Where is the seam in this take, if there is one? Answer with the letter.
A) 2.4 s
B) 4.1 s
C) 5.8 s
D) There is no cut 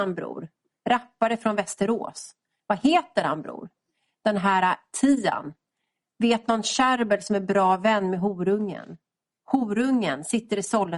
D